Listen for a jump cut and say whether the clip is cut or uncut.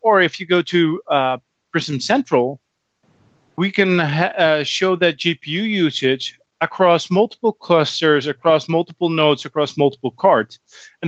uncut